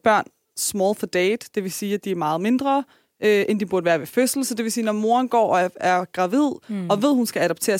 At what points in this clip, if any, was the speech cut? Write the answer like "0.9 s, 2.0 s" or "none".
none